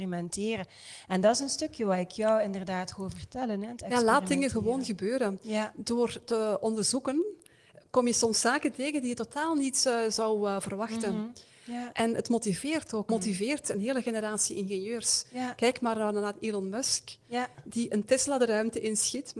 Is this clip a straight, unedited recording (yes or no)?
no